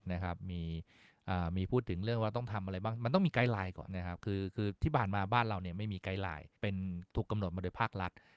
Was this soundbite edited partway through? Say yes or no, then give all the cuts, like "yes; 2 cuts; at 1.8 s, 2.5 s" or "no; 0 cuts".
yes; 2 cuts; at 3.9 s, 6.6 s